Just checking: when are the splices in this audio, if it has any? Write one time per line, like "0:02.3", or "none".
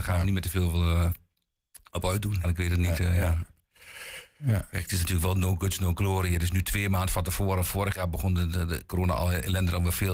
0:02.4